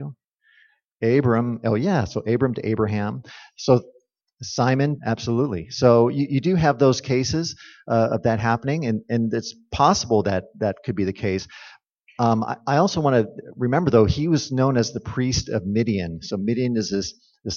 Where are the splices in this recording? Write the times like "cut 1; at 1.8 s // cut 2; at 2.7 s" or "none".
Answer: cut 1; at 5.0 s